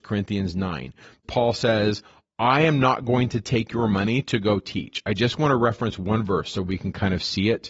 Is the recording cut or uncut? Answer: uncut